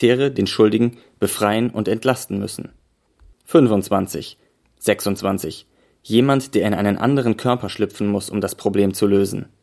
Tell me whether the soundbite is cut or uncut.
cut